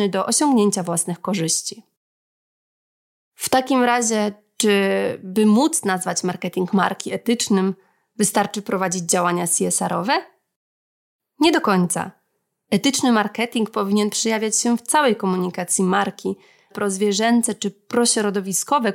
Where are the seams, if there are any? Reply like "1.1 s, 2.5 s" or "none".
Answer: 16.7 s